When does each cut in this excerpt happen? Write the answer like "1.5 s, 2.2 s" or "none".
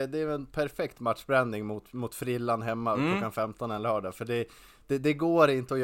none